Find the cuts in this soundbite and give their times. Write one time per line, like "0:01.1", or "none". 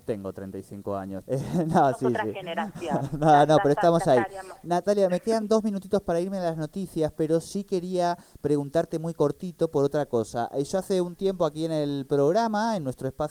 0:01.3